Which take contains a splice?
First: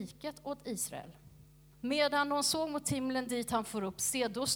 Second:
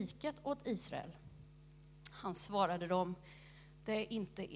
first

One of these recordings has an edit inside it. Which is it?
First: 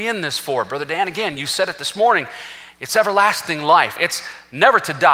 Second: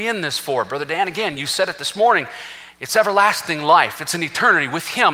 first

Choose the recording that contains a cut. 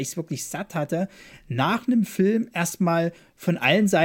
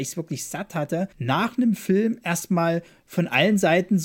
second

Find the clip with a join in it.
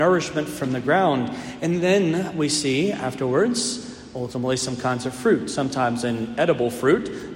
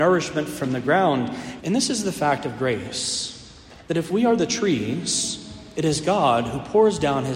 second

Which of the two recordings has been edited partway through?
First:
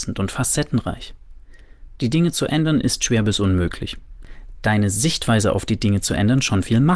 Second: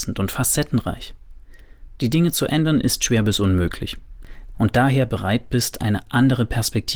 second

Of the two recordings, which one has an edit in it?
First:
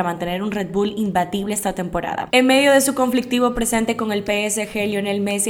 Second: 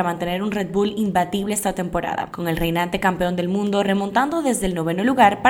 first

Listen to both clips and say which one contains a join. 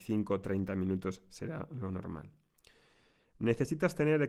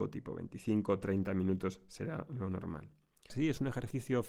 second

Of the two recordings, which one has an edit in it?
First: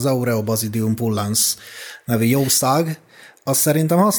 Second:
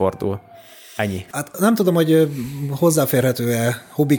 second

